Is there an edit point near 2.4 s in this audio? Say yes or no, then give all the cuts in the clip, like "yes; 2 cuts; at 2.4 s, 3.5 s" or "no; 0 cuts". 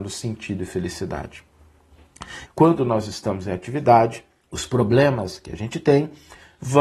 yes; 2 cuts; at 2.4 s, 4.4 s